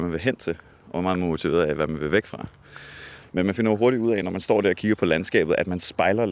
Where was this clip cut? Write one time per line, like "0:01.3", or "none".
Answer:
0:03.2